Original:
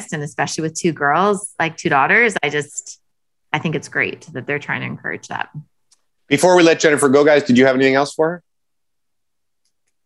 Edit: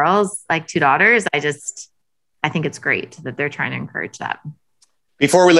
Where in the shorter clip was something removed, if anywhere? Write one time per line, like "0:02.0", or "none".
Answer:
none